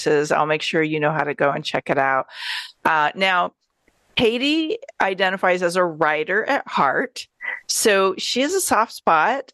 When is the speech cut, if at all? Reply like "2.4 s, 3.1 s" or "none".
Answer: none